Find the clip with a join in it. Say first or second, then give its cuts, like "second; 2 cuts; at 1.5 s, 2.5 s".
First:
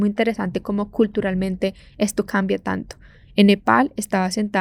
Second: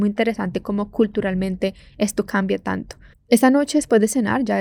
second; 1 cut; at 3.1 s